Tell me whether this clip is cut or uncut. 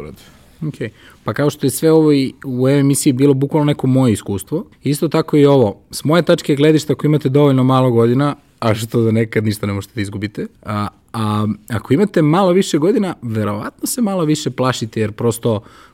cut